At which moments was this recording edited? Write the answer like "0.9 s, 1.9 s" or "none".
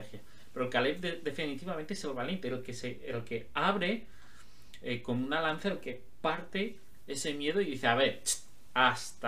none